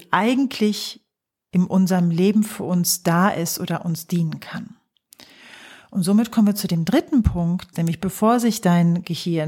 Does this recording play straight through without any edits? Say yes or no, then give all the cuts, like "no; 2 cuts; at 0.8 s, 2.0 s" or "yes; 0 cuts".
no; 1 cut; at 7.7 s